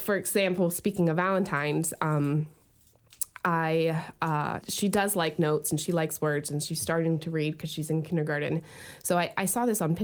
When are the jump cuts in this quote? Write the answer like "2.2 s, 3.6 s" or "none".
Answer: 4.6 s